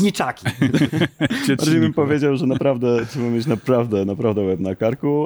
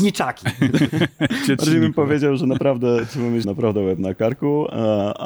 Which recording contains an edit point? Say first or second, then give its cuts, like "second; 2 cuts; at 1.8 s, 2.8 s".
second; 1 cut; at 3.4 s